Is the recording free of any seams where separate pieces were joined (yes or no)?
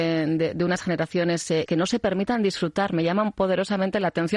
no